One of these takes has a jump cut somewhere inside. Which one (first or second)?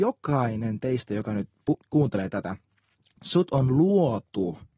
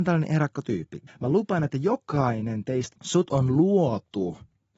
second